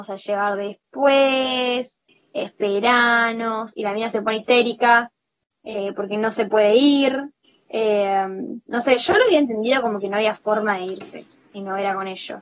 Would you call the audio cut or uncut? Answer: cut